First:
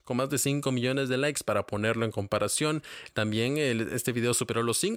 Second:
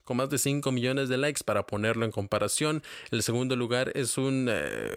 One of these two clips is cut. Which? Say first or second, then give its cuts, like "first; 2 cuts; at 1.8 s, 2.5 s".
first; 1 cut; at 3.1 s